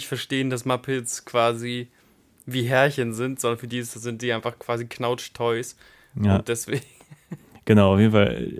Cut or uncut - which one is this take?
uncut